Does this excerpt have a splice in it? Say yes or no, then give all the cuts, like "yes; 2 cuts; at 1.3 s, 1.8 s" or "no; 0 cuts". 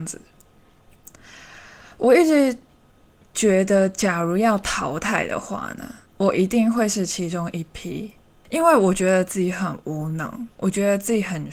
yes; 2 cuts; at 6.1 s, 8.4 s